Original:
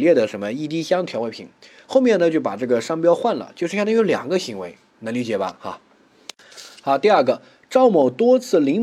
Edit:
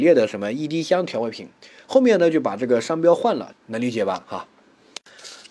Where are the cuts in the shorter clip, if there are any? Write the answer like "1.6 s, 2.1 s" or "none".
3.5 s